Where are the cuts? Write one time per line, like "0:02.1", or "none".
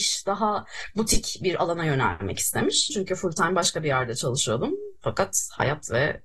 0:02.9